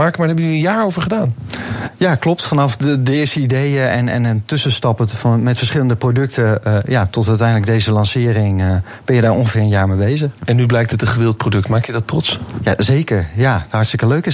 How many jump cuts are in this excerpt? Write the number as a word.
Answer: zero